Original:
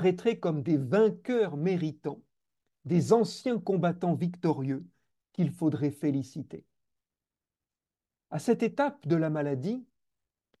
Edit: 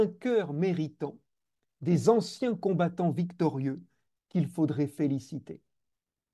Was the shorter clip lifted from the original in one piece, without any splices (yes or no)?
yes